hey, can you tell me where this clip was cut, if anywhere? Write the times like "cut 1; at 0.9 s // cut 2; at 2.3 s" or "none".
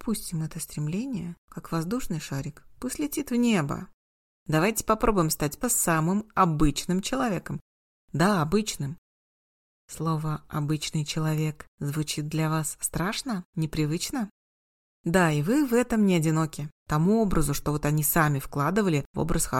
cut 1; at 5.6 s // cut 2; at 16.7 s

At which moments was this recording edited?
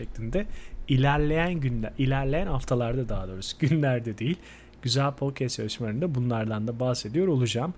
none

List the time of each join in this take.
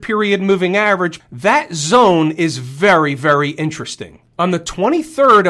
cut 1; at 1.2 s // cut 2; at 4.3 s

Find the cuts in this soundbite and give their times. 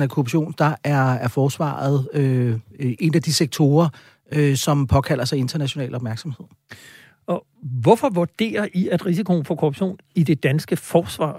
none

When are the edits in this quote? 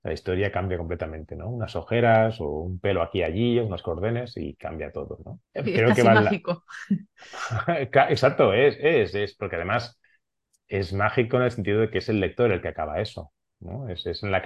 cut 1; at 5.4 s

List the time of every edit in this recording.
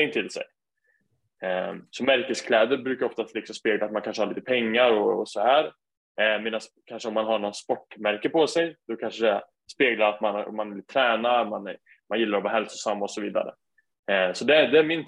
none

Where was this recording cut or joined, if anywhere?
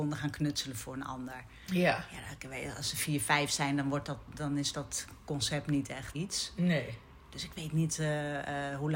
cut 1; at 6.1 s

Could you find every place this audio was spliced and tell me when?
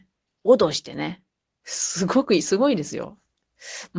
none

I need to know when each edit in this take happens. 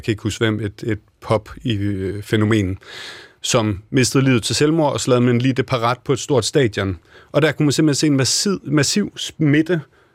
none

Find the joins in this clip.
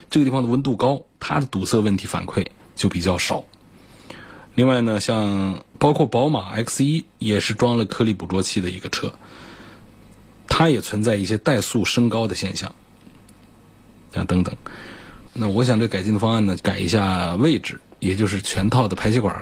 cut 1; at 15.3 s // cut 2; at 16.6 s

